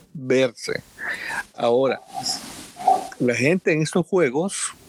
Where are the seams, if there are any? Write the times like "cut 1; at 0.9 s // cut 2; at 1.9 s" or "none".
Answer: none